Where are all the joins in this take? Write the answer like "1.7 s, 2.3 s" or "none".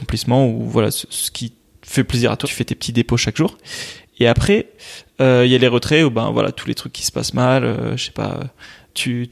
2.4 s